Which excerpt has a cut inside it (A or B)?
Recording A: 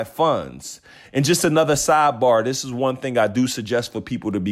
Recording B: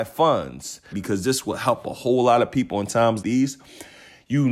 B